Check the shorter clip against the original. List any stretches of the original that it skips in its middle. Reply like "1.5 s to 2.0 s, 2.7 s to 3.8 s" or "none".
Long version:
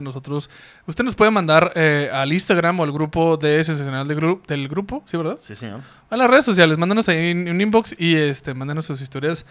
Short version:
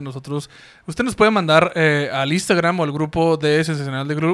none